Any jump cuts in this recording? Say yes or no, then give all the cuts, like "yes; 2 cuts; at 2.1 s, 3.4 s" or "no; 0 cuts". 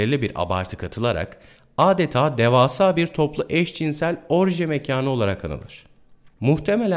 no; 0 cuts